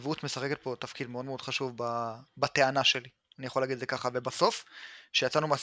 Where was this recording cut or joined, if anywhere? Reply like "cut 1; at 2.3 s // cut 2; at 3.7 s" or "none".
none